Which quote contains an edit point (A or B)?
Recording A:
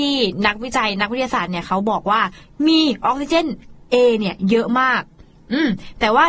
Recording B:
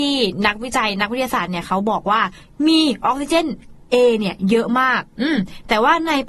B